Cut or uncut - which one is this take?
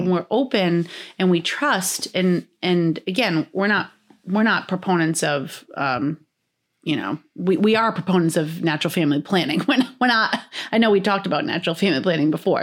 uncut